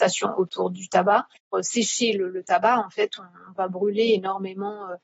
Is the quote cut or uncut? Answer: uncut